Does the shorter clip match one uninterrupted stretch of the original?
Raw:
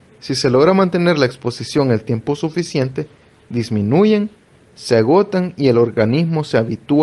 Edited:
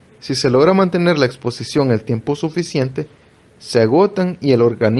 no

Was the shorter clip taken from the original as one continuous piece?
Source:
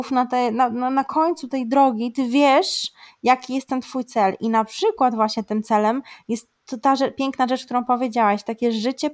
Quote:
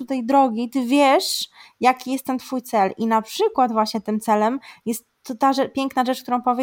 yes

